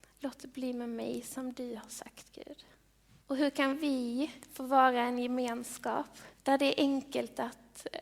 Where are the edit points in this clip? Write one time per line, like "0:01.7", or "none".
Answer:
0:03.2
0:06.4